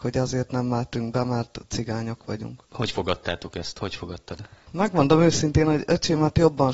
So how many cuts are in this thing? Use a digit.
0